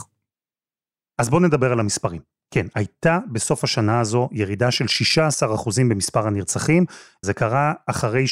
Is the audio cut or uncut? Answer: cut